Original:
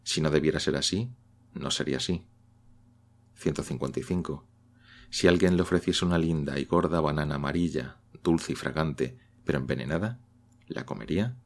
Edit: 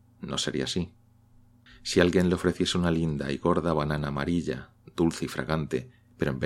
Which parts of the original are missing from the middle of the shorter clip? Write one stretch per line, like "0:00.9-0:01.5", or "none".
0:03.0-0:04.9